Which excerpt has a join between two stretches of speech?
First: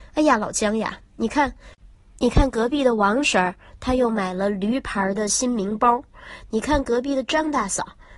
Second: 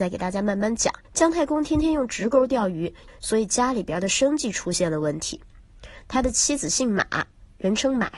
second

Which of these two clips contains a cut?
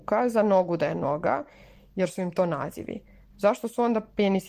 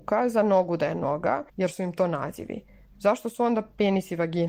second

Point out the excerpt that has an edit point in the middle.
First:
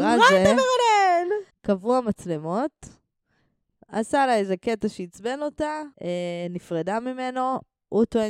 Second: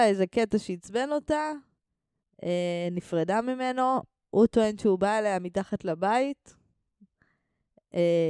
first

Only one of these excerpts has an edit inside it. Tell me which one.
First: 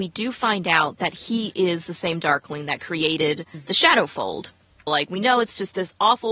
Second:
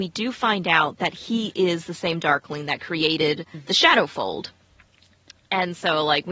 first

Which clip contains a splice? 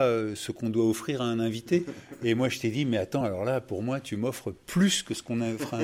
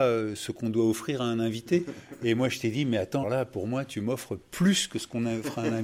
second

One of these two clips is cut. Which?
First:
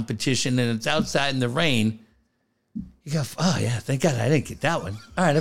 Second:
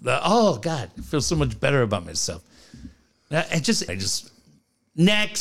second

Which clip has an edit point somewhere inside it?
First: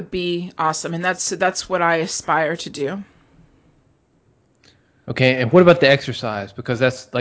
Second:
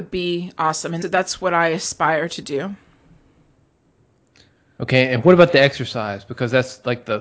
second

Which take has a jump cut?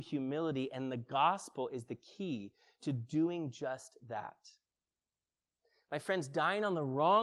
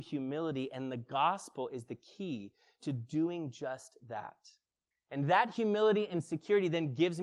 second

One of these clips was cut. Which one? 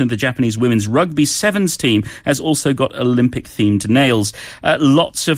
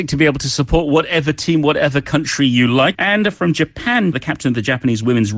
second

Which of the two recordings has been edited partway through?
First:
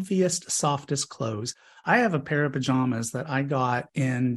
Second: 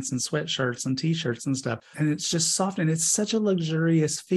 second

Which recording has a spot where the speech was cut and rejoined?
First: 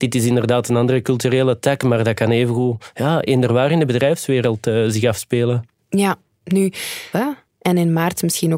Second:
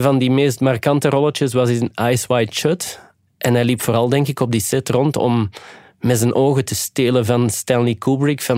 first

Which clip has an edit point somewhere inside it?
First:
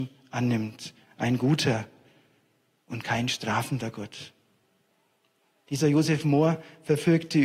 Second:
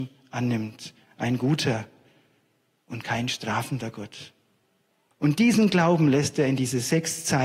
second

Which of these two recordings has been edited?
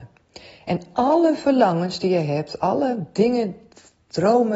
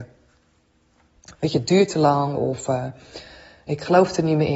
second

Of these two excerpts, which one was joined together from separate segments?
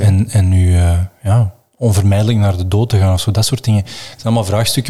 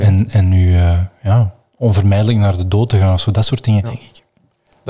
second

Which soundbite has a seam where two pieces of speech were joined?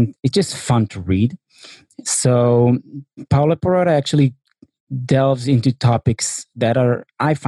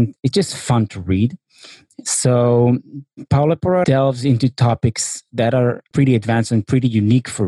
second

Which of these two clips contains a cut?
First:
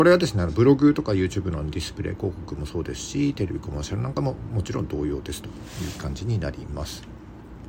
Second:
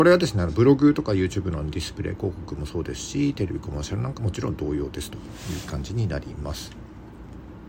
second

